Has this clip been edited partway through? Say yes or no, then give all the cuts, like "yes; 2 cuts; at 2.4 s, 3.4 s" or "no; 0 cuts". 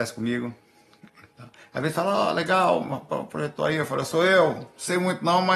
no; 0 cuts